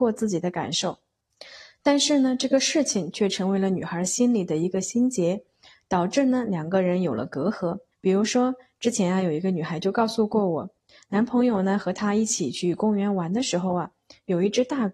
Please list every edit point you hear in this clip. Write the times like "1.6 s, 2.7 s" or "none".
7.9 s